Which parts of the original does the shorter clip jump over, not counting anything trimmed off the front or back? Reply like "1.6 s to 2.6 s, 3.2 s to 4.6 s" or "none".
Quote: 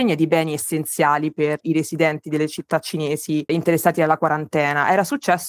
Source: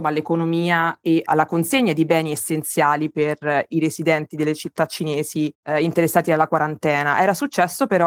3.4 s to 3.7 s, 5.6 s to 5.8 s